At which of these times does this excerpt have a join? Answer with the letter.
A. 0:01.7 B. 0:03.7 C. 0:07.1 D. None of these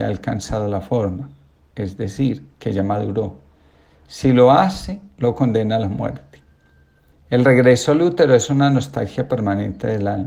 C